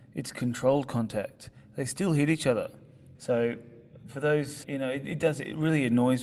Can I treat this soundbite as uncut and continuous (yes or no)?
no